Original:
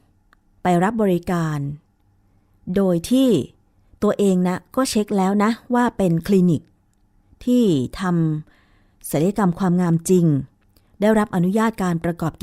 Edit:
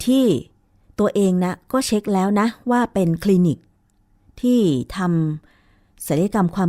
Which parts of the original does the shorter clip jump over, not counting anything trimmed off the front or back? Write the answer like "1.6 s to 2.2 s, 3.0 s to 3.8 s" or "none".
none